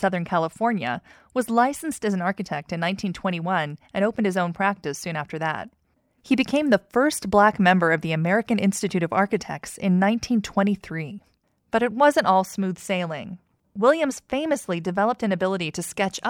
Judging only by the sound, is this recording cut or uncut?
uncut